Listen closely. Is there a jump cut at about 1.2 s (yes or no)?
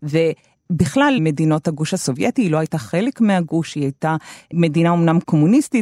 yes